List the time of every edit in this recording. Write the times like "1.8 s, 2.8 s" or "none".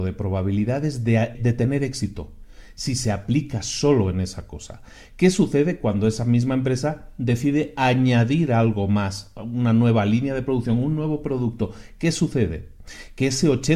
1.3 s